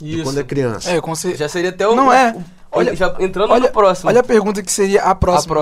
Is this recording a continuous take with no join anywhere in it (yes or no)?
yes